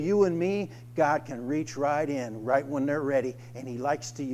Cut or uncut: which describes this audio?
uncut